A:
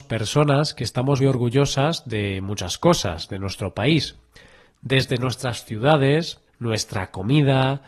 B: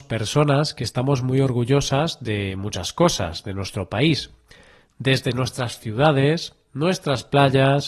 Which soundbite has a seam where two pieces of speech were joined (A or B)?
A